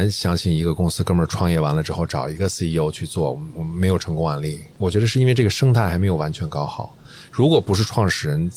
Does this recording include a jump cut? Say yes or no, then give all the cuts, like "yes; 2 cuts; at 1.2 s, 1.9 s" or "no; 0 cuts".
no; 0 cuts